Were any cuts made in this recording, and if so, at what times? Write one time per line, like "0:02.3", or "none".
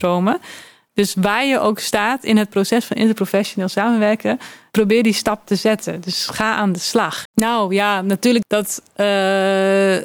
0:07.3
0:08.4